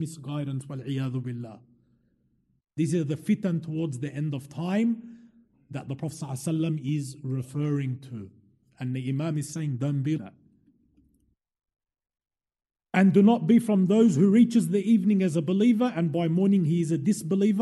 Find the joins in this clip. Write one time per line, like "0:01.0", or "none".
0:10.2